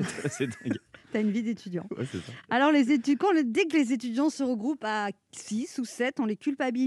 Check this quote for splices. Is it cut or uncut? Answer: uncut